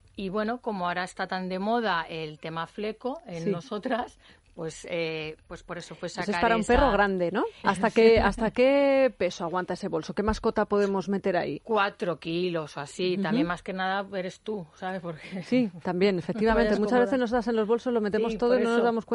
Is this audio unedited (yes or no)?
no